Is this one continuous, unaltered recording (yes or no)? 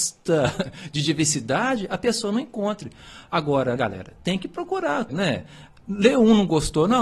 no